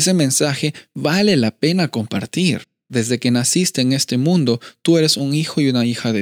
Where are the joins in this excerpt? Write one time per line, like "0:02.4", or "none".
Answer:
0:02.9